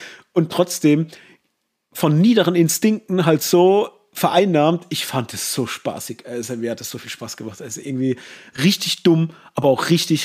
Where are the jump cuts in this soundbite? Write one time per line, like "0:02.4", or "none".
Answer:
none